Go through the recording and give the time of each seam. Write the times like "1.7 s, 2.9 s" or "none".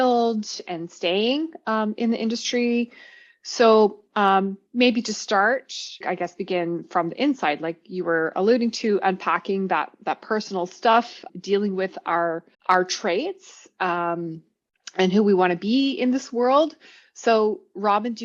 6.0 s, 11.3 s, 12.5 s